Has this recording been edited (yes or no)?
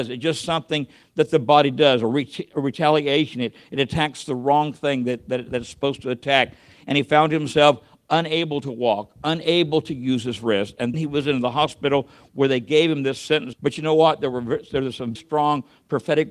yes